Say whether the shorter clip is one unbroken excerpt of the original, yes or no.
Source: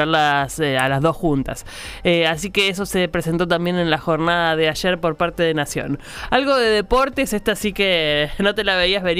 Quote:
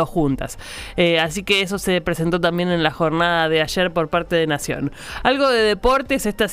yes